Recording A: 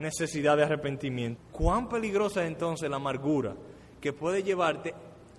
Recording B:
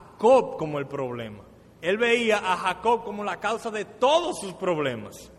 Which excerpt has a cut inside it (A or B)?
A